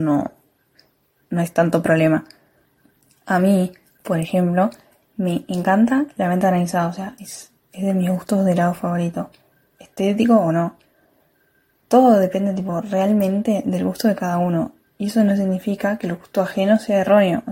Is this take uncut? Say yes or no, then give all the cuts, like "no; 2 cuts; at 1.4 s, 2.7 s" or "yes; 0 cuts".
no; 1 cut; at 9.6 s